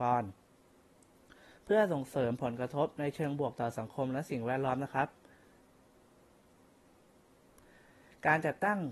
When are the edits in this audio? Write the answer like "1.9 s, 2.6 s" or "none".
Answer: none